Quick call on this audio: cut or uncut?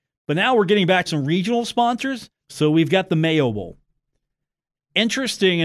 cut